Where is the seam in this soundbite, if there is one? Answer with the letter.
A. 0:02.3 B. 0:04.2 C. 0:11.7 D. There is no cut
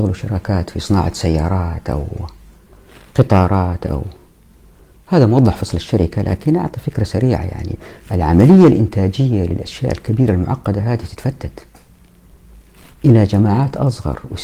D